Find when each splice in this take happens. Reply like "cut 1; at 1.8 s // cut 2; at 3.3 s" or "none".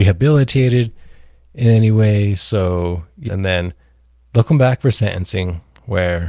cut 1; at 3.3 s